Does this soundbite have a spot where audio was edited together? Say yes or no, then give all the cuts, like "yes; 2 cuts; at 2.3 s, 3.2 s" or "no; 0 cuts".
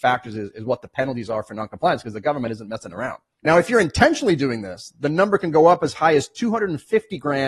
yes; 1 cut; at 3.4 s